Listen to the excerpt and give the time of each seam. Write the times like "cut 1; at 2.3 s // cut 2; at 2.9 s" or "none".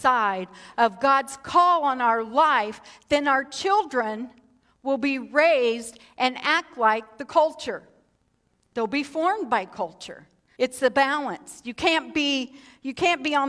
cut 1; at 10.6 s

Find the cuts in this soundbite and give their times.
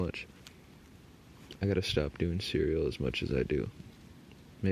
none

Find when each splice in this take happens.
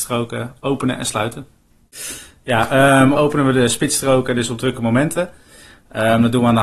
cut 1; at 3.1 s

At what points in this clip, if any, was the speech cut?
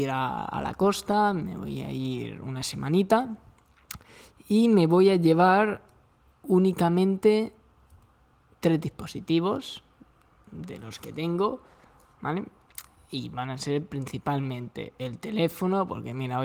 none

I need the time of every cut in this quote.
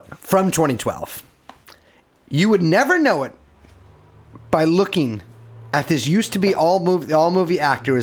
none

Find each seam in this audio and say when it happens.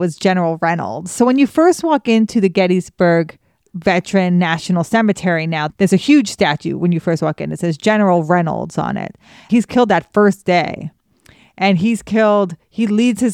cut 1; at 5.7 s // cut 2; at 9.5 s

